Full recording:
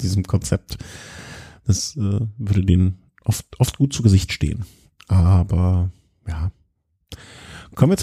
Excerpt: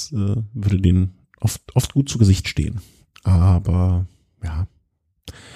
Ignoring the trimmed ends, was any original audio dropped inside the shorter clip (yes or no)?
no